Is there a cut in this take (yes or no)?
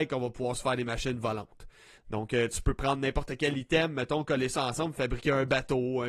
yes